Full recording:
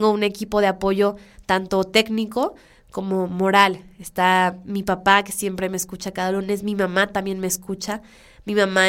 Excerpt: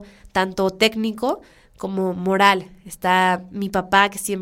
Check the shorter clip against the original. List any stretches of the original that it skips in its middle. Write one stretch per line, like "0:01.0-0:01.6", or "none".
none